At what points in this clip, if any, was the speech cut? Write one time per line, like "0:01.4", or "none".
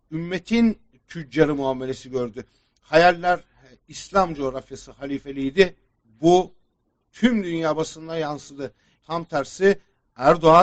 0:06.0
0:09.0